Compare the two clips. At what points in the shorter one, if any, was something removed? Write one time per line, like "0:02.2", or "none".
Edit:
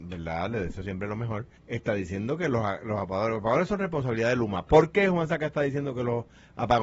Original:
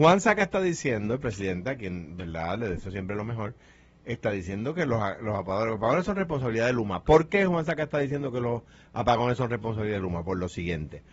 0:01.6

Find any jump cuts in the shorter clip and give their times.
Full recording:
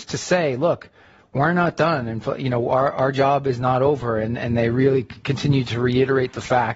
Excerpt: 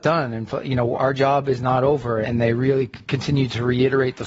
0:00.9
0:02.2

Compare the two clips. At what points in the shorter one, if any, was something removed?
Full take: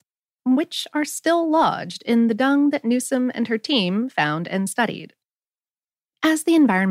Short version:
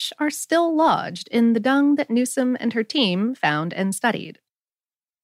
none

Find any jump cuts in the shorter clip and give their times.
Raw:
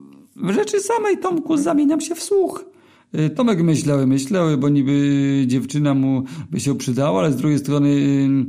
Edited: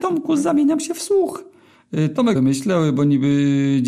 0:02.4

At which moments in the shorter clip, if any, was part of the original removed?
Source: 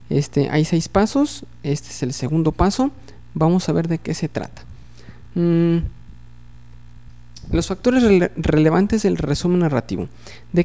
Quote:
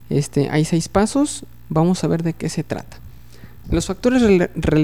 0:01.6
0:03.6

